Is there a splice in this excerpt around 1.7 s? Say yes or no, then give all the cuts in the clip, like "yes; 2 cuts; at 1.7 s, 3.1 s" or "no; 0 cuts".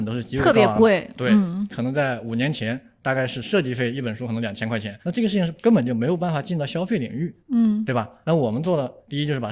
yes; 2 cuts; at 1.7 s, 5.0 s